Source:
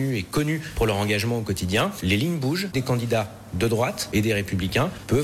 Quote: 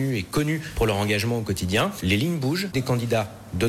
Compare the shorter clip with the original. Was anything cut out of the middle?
no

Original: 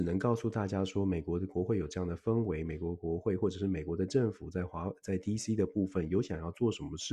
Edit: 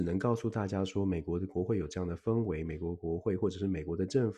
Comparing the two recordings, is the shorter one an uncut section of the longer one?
yes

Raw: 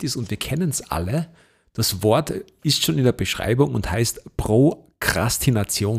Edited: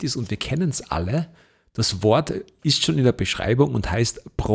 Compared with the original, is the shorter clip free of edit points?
yes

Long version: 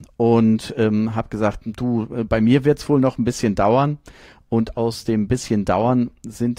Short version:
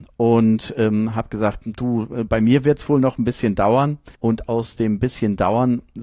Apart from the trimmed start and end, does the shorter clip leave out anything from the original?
yes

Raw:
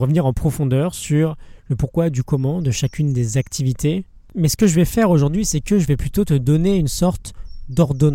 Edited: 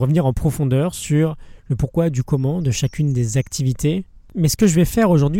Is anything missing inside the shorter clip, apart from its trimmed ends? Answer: no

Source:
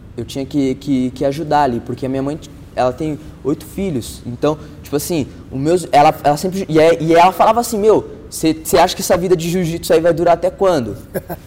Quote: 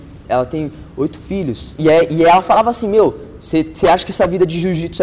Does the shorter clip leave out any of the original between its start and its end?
yes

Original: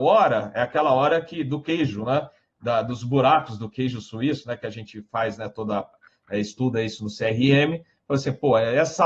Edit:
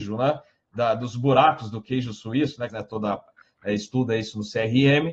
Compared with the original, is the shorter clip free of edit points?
no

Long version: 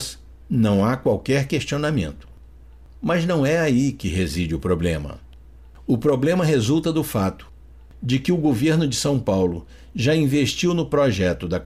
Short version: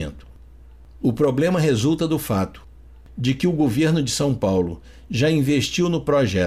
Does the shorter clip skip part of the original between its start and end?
yes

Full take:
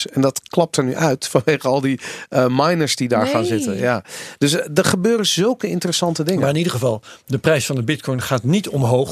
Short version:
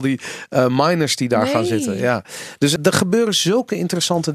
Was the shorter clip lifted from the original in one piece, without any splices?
no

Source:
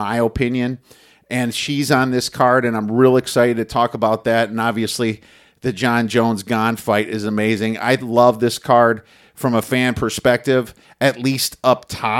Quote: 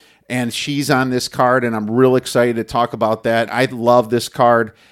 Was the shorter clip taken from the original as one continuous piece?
no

